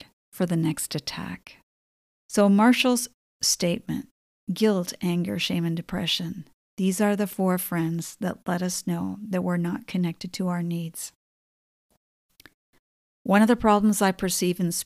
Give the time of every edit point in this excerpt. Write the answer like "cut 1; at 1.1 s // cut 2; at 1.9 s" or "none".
none